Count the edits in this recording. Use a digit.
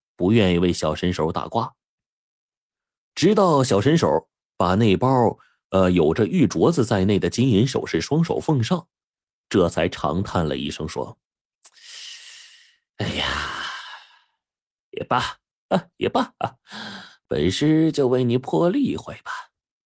0